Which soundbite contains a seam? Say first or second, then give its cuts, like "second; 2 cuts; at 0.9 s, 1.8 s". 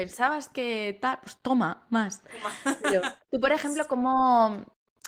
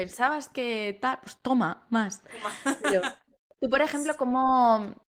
first; 1 cut; at 3.2 s